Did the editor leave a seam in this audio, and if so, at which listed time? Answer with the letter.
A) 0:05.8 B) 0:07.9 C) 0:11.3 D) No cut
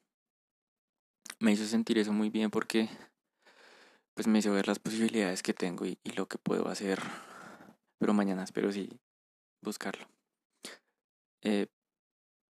B